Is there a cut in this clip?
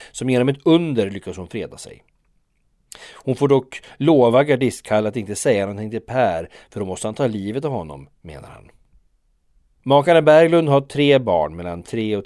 no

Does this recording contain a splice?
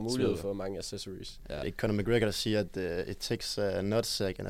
no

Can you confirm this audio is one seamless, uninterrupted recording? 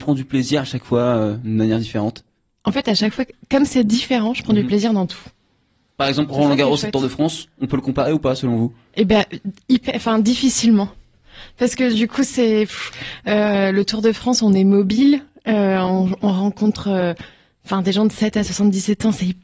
yes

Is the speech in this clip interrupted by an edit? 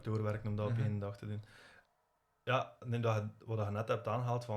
no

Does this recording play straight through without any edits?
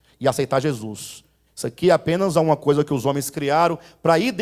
yes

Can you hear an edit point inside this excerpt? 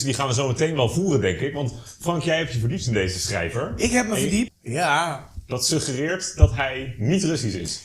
yes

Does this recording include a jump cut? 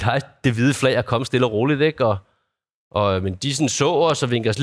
no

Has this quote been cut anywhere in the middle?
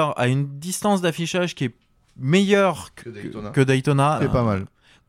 yes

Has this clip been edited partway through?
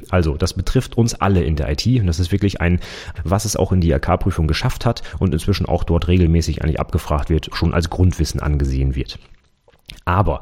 yes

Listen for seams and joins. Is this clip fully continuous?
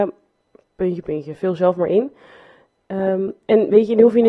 no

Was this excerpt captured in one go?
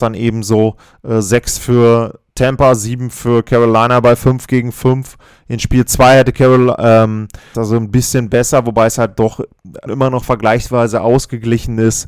no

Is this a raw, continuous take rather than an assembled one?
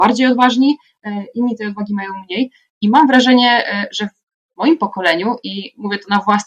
yes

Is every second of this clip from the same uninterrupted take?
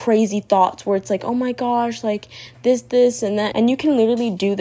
no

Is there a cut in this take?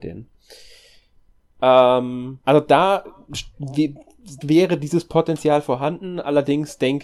yes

